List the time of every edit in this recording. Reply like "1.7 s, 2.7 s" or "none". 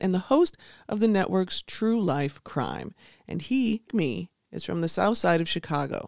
3.9 s